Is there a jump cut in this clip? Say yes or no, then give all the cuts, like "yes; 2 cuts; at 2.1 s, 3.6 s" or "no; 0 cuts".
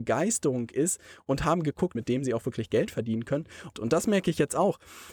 yes; 2 cuts; at 1.9 s, 3.7 s